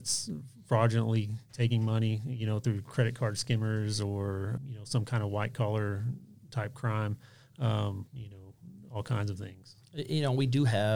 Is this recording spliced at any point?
yes; 2 cuts; at 4.6 s, 8.1 s

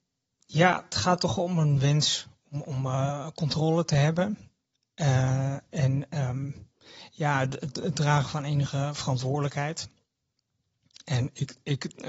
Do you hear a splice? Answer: no; 0 cuts

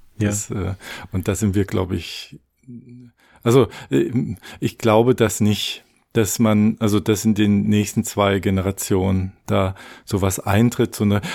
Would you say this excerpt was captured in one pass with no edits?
yes; 0 cuts

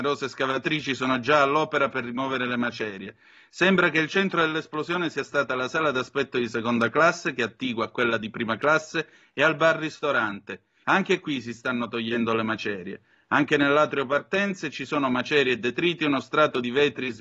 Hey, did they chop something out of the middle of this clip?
yes; 1 cut; at 10.8 s

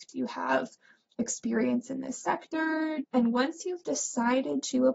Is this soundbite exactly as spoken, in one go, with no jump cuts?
no; 1 cut; at 3.0 s

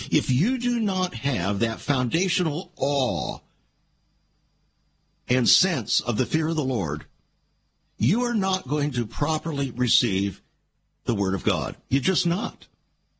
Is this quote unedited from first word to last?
yes; 0 cuts

